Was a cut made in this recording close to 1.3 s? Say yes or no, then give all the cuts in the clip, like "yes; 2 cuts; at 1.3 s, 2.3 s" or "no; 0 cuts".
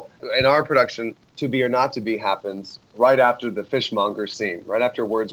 no; 0 cuts